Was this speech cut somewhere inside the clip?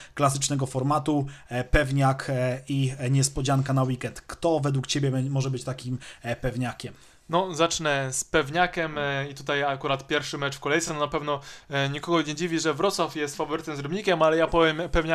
no; 0 cuts

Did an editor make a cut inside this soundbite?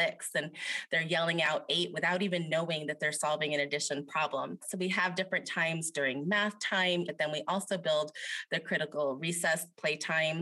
yes; 2 cuts; at 4.6 s, 7.1 s

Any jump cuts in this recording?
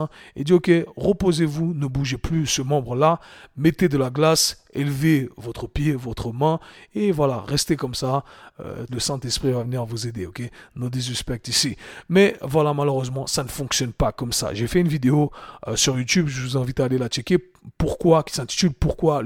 yes; 1 cut; at 8.9 s

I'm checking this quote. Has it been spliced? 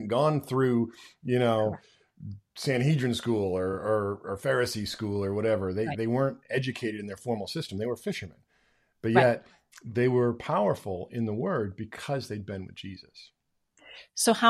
no; 0 cuts

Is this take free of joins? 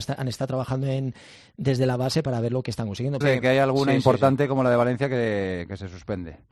no; 1 cut; at 3.2 s

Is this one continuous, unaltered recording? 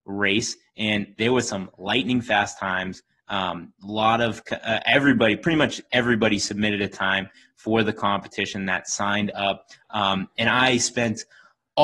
yes; 0 cuts

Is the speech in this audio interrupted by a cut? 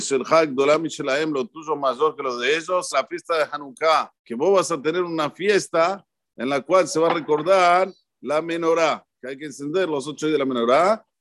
yes; 2 cuts; at 2.9 s, 4.2 s

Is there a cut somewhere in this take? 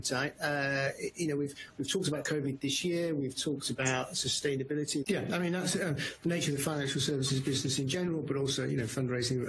yes; 1 cut; at 5.0 s

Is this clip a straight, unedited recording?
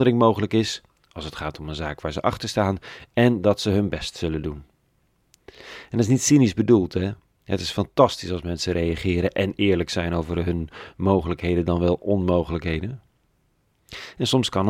yes; 0 cuts

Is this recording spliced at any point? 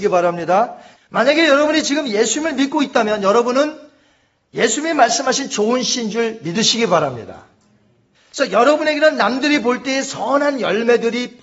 yes; 2 cuts; at 1.0 s, 8.1 s

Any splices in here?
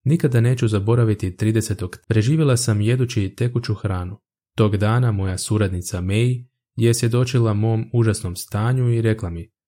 yes; 2 cuts; at 2.0 s, 4.4 s

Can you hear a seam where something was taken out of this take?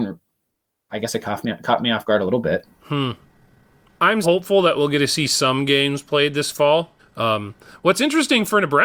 yes; 2 cuts; at 4.2 s, 7.0 s

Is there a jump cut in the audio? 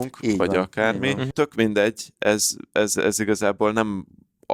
yes; 1 cut; at 1.3 s

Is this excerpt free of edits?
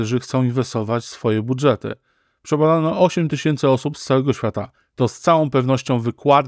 yes; 0 cuts

